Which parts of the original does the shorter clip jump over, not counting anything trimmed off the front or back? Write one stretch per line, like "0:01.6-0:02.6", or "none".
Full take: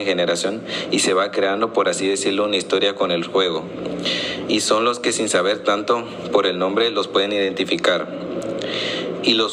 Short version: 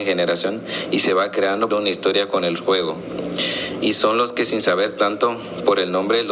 0:01.7-0:02.4